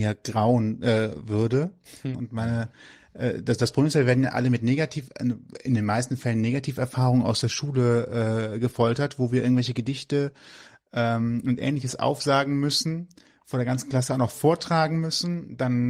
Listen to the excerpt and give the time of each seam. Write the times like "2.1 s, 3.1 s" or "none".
2.1 s